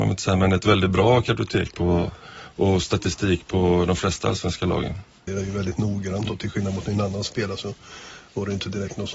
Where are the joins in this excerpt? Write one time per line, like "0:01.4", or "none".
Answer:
0:05.3